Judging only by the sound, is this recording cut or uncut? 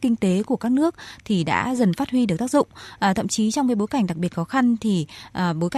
uncut